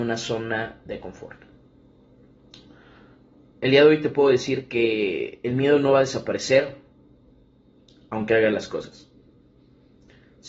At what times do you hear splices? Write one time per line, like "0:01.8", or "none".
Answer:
none